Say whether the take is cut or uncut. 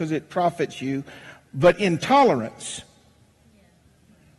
uncut